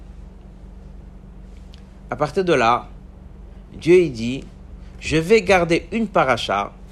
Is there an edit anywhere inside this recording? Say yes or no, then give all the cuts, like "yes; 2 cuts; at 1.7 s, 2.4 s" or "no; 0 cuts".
no; 0 cuts